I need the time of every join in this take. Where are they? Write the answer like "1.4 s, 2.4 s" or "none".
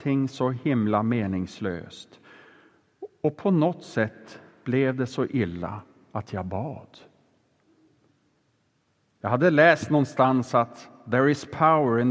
none